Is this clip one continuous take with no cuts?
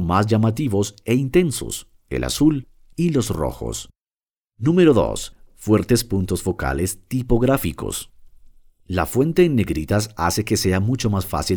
no; 1 cut; at 1.9 s

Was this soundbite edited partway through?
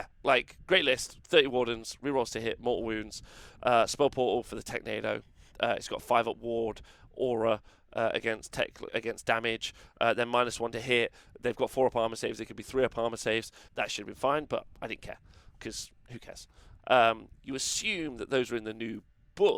yes; 3 cuts; at 8.9 s, 13.7 s, 16.8 s

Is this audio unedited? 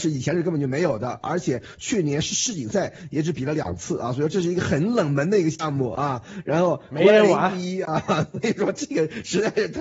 yes; 0 cuts

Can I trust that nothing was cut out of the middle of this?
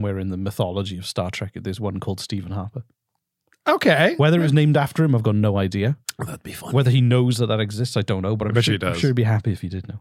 yes; 0 cuts

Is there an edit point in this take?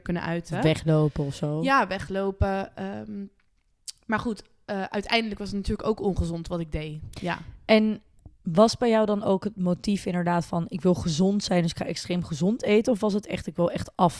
no; 0 cuts

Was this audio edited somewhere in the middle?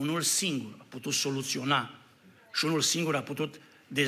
no; 0 cuts

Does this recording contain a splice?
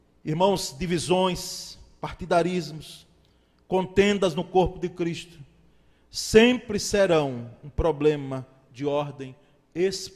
no; 0 cuts

